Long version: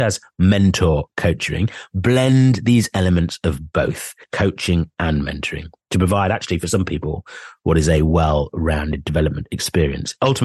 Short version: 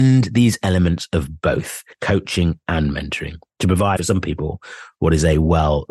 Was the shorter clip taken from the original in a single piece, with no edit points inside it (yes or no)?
no